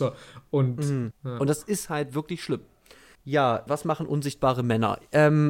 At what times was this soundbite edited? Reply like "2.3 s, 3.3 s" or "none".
1.1 s, 3.7 s

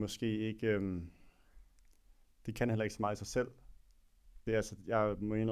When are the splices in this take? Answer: 4.5 s

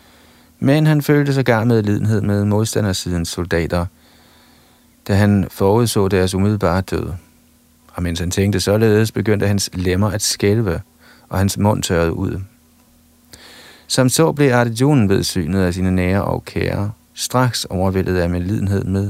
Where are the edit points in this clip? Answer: 13.9 s, 17.1 s

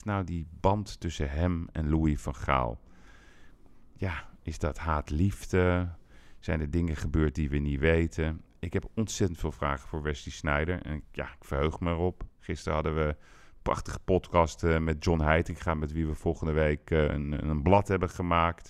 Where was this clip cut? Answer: none

